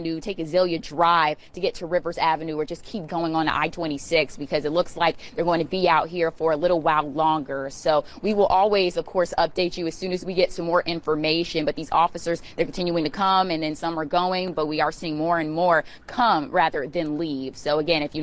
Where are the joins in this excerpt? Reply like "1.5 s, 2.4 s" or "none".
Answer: none